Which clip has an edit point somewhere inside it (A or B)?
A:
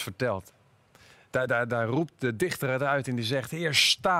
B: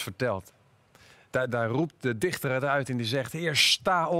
B